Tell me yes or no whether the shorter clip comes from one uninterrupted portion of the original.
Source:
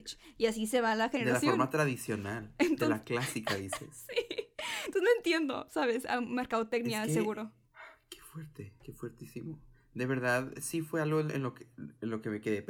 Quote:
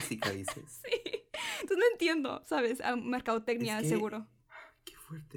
yes